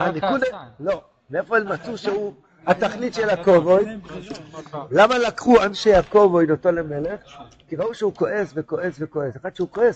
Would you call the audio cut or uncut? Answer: uncut